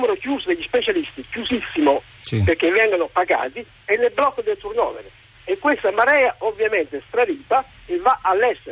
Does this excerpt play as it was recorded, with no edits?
yes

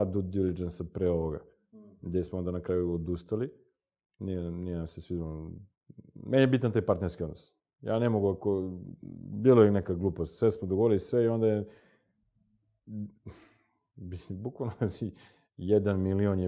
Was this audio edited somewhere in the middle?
no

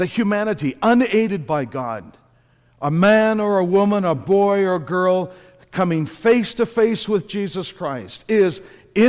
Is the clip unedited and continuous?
yes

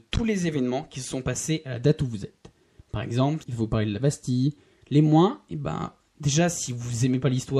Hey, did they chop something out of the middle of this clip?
yes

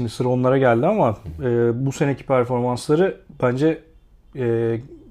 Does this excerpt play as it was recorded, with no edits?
yes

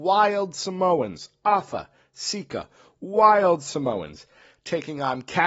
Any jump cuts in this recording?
no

